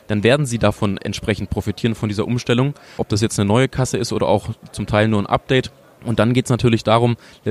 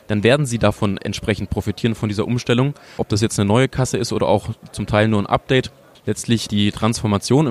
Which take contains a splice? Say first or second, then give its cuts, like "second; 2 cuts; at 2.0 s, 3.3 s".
second; 1 cut; at 5.9 s